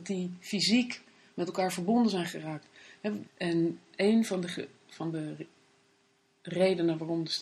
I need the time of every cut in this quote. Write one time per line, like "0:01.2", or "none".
0:03.2